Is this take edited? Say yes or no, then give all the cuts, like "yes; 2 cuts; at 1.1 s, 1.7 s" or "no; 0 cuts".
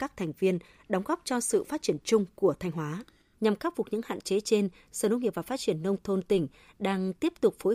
yes; 1 cut; at 3.3 s